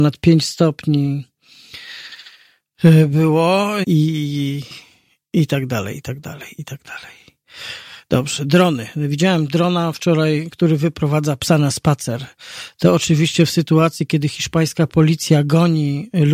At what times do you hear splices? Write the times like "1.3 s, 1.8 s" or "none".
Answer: 3.8 s